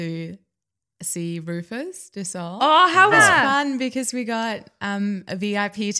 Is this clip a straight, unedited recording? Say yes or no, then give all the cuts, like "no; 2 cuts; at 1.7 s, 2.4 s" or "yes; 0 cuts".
no; 1 cut; at 3.1 s